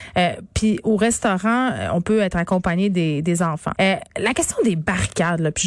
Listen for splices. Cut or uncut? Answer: cut